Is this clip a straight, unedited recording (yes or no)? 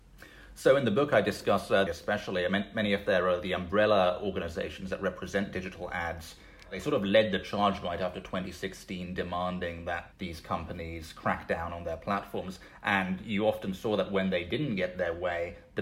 no